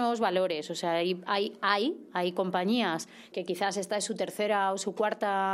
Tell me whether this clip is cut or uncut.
cut